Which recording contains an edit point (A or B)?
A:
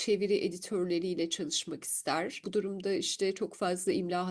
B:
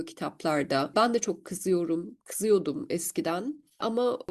A